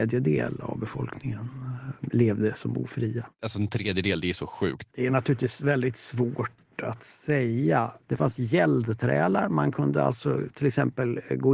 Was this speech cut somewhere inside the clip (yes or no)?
yes